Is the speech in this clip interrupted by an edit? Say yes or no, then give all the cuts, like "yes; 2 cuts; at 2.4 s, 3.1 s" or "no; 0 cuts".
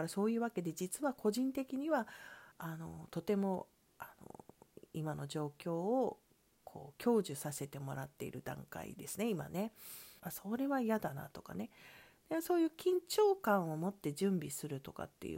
yes; 2 cuts; at 2.5 s, 10.2 s